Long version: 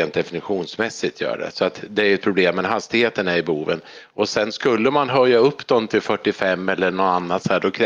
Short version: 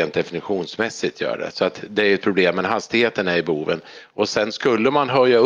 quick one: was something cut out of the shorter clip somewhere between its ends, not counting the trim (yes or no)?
no